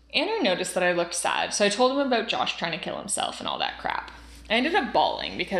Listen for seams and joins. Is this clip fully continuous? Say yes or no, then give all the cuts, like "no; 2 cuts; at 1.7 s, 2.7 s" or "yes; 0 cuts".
yes; 0 cuts